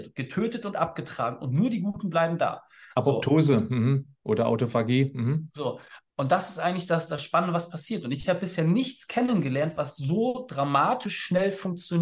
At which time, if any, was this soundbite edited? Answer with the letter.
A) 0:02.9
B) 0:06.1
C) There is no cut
C